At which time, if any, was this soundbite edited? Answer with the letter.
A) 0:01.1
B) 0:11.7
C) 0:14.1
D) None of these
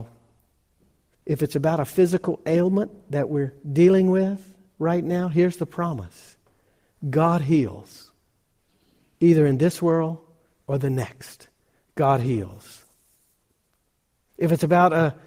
A